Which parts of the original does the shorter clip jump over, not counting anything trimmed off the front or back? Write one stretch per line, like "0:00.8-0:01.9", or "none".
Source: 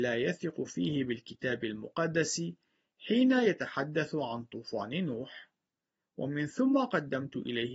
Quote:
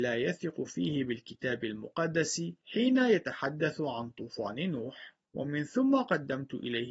0:02.6-0:03.0
0:05.6-0:06.1